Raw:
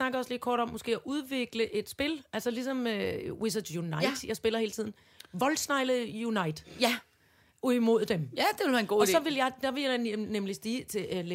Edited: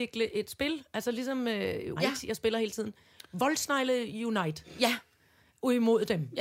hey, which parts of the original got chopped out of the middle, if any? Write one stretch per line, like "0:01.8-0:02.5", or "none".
0:03.3-0:04.0